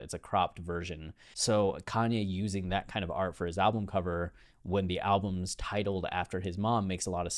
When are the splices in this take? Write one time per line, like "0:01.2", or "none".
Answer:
0:01.3